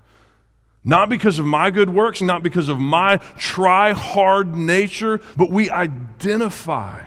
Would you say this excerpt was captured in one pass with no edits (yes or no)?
no